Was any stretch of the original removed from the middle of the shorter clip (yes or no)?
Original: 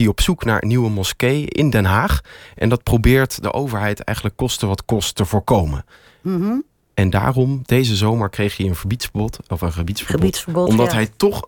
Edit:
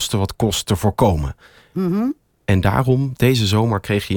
no